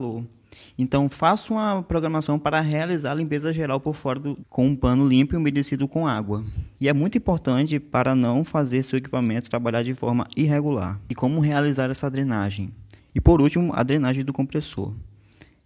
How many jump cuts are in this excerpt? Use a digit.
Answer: 3